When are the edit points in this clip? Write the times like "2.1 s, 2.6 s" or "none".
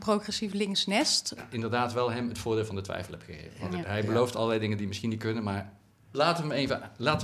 1.4 s, 3.8 s

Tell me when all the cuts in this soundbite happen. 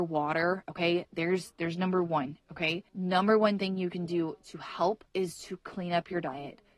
2.9 s, 5.1 s

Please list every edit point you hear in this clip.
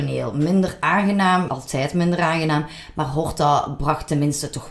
1.5 s

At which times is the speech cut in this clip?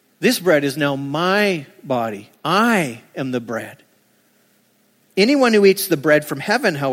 5.0 s

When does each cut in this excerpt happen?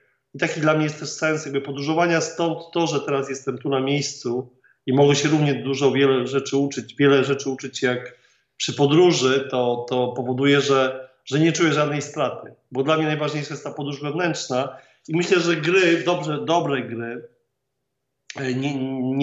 none

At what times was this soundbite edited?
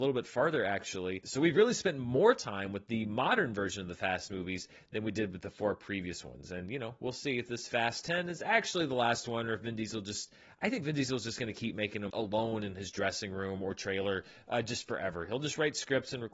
12.1 s

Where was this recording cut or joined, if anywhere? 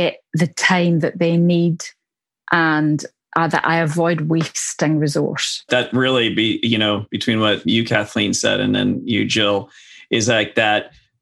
5.7 s, 7.6 s

